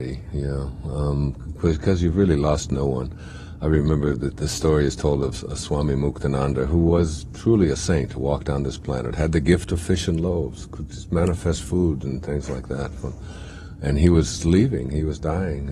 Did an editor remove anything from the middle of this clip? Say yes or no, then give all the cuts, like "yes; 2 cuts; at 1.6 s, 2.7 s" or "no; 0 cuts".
no; 0 cuts